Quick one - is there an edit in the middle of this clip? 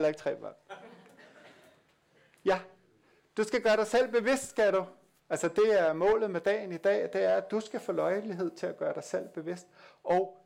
no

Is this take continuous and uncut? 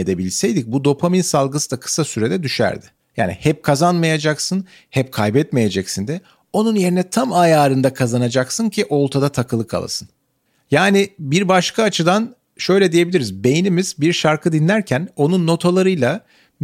no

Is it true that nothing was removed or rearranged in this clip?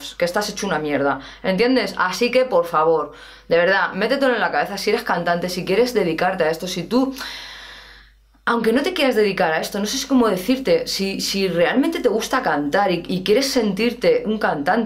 yes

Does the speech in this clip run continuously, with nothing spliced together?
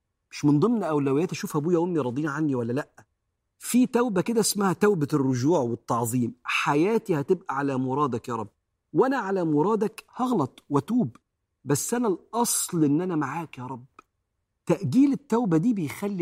yes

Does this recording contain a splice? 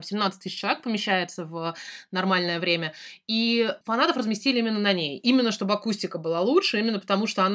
yes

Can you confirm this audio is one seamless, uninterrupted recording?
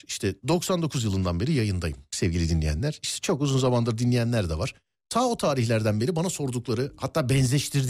yes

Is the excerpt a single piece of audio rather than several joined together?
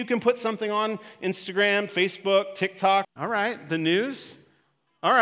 no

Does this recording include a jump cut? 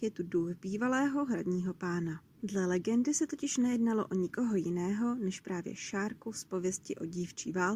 yes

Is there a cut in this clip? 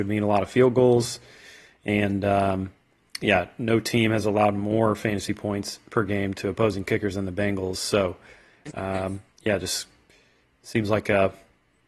no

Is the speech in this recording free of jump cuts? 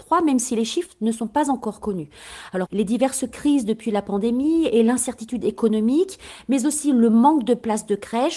no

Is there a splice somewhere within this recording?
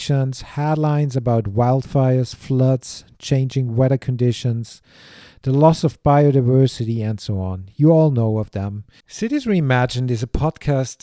yes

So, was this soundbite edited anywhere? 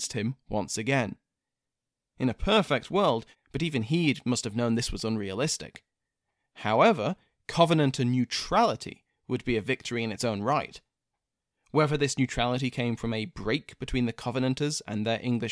yes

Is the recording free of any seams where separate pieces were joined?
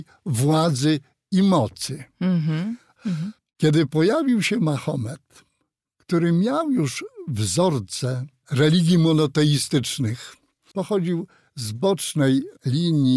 no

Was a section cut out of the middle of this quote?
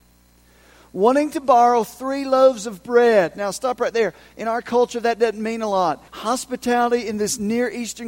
yes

